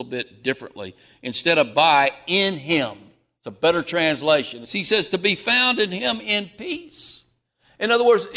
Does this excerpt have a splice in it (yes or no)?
yes